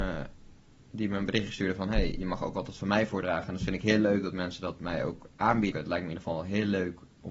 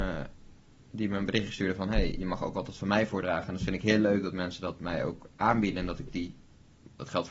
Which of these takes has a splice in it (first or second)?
first